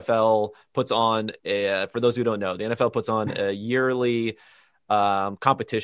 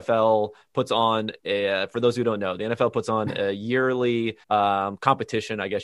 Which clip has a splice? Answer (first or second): second